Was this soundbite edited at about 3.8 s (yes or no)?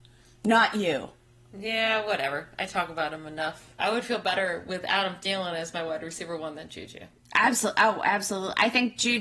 yes